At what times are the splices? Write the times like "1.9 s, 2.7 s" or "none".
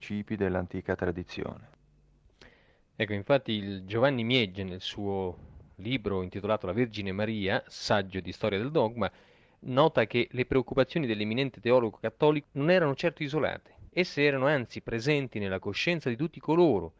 12.4 s, 13.9 s